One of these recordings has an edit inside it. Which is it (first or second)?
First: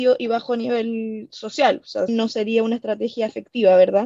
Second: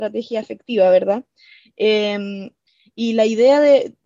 first